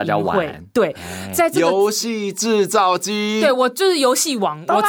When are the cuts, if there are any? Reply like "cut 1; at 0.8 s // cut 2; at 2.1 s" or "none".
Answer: none